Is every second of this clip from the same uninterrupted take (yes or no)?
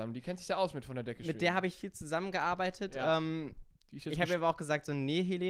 yes